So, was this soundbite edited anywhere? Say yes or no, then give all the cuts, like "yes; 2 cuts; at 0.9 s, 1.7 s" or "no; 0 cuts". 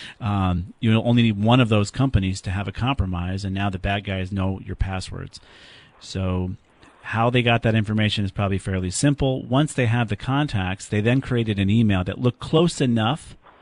no; 0 cuts